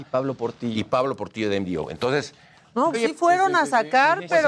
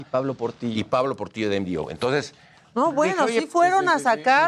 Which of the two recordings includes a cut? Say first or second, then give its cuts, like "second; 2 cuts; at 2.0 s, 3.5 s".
first; 1 cut; at 2.9 s